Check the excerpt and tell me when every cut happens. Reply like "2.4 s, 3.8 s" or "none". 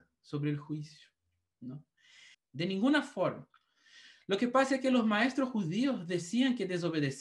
2.3 s